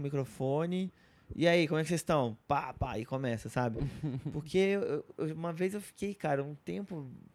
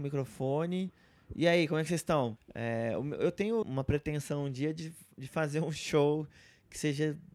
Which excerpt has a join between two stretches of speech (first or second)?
second